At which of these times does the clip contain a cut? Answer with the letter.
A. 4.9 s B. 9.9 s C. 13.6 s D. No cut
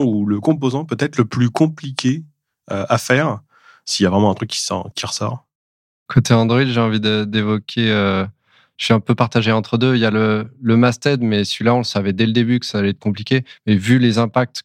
A